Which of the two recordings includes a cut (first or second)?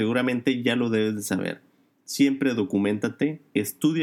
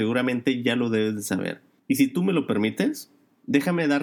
second